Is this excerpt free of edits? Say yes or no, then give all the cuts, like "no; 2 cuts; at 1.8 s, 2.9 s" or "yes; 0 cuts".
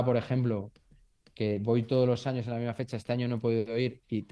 yes; 0 cuts